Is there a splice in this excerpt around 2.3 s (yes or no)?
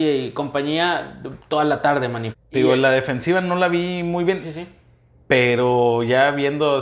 yes